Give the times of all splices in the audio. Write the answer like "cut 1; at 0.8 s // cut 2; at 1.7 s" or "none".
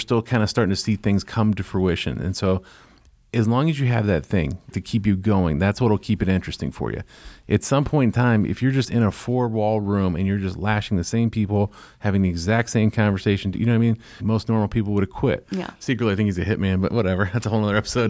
cut 1; at 4.7 s // cut 2; at 14.2 s // cut 3; at 15.4 s